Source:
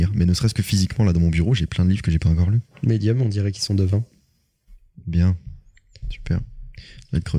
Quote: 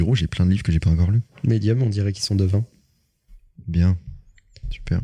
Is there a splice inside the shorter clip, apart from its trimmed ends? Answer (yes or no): no